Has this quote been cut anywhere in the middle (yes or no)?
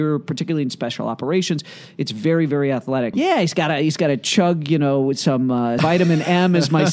yes